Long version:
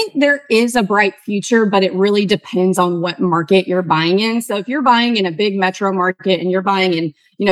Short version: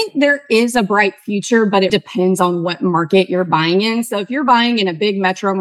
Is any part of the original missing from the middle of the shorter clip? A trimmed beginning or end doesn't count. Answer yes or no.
yes